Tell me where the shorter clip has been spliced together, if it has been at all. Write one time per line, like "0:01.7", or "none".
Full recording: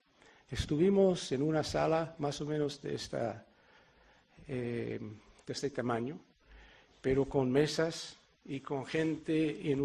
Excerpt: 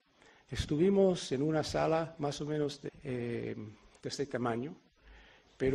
0:02.9